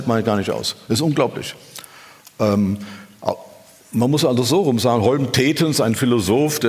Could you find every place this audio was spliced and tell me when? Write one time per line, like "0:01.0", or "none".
none